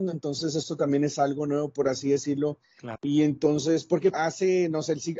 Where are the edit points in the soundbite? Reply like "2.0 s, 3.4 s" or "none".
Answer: 3.0 s, 4.1 s